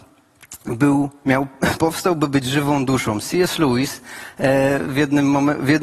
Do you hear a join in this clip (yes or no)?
no